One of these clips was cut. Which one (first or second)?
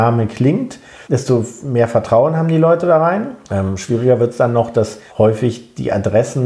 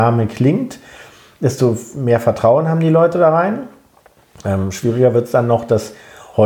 first